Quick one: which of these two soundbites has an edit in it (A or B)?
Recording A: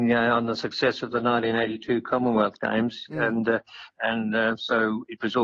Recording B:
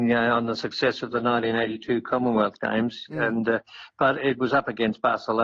A